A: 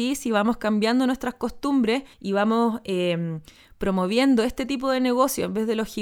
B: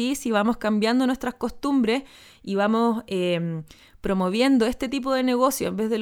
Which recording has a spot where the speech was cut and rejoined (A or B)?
A